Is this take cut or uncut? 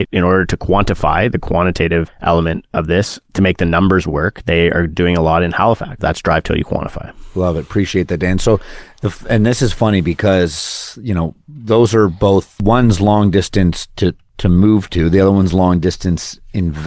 cut